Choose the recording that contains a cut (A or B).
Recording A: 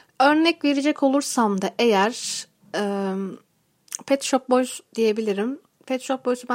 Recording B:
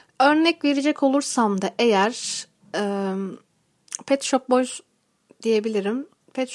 A